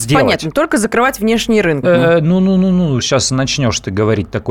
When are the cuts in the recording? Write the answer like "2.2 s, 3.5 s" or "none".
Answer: 1.8 s, 3.0 s

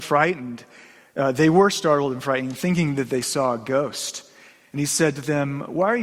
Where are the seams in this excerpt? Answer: none

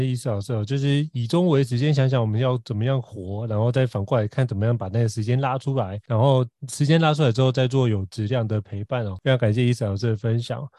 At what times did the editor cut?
none

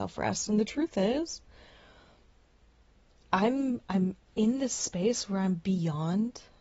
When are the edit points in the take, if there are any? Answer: none

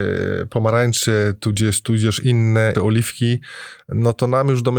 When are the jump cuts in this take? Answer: 2.7 s

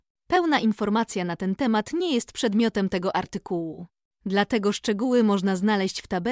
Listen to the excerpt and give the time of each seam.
none

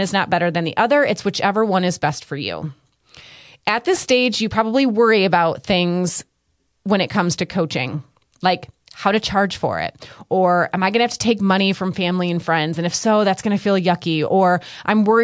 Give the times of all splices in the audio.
none

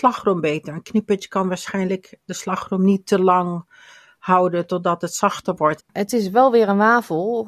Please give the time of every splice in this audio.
5.8 s

